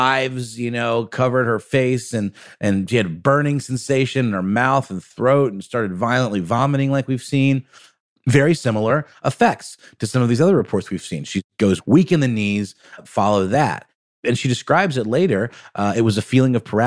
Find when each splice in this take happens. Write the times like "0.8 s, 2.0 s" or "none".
13.0 s